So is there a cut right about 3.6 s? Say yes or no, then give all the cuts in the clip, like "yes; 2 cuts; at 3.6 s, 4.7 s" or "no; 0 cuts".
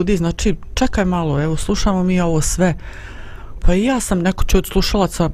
yes; 1 cut; at 3.6 s